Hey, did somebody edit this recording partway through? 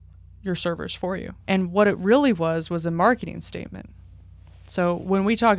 yes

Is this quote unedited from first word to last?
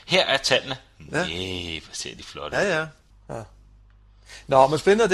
no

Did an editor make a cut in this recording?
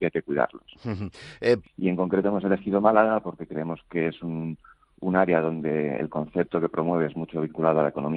yes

